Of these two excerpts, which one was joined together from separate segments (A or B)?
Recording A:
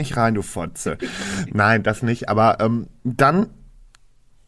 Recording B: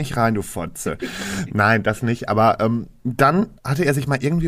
B